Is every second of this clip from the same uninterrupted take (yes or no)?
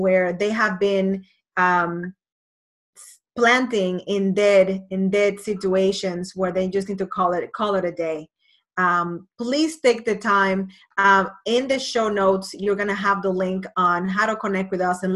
yes